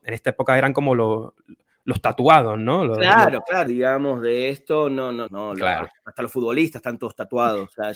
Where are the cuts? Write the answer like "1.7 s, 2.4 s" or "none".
3.7 s, 5.3 s

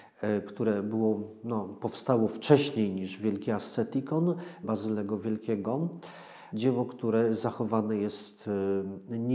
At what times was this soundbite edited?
4.6 s, 6.5 s

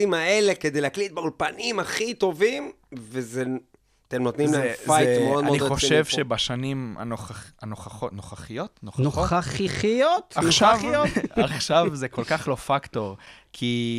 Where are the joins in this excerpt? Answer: none

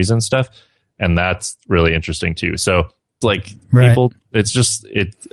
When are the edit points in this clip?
3.2 s

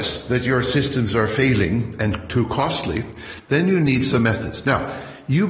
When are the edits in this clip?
none

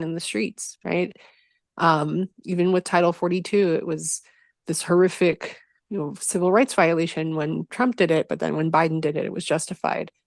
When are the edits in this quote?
none

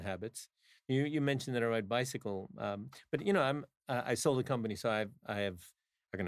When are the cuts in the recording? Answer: none

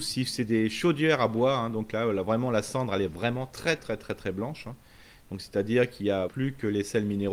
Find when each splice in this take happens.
3.8 s, 6.3 s

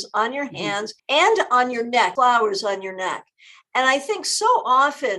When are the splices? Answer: 1.0 s, 2.2 s

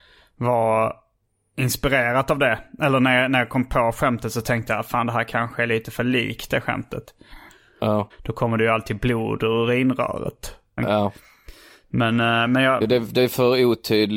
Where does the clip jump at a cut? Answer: 8.1 s, 10.8 s, 12.8 s

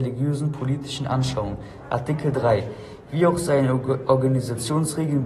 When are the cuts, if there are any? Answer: none

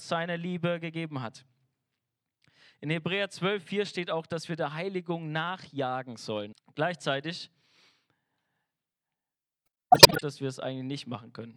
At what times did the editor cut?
6.5 s

